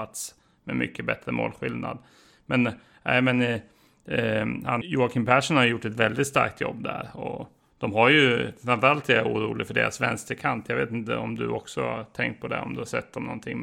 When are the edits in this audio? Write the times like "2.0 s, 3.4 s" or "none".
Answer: 4.8 s